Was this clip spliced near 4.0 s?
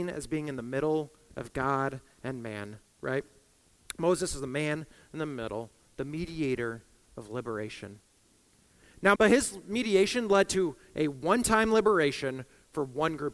no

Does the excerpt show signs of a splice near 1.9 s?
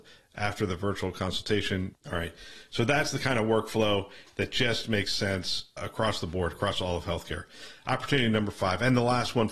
yes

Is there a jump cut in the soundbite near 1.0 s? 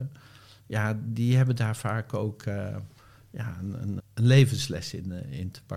no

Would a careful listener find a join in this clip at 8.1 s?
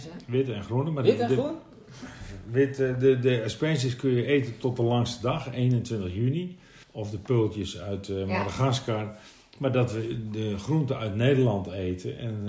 no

